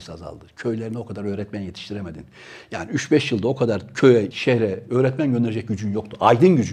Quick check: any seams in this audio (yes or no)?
yes